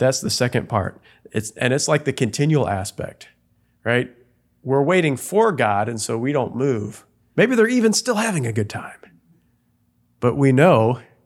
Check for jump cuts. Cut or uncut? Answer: cut